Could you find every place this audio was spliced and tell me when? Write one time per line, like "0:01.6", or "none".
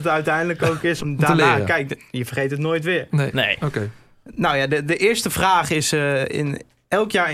0:01.0